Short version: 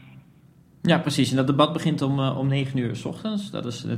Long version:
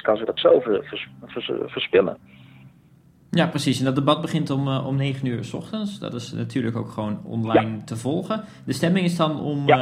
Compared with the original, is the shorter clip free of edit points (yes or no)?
yes